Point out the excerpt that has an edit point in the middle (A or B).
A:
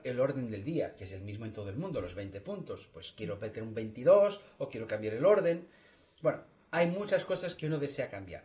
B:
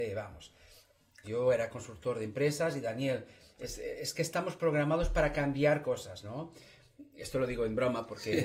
B